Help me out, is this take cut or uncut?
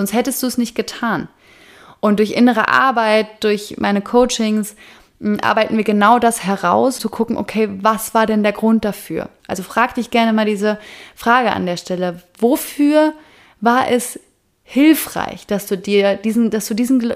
cut